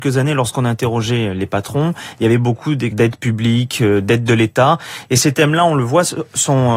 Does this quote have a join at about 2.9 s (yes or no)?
yes